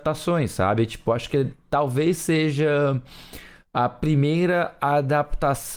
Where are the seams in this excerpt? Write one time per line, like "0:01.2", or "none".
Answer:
none